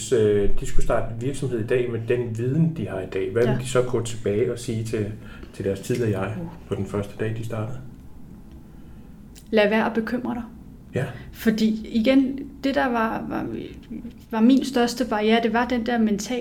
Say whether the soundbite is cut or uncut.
uncut